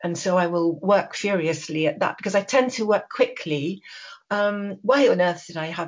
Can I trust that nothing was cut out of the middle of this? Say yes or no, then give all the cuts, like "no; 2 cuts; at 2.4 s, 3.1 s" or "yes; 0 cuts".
no; 1 cut; at 4.2 s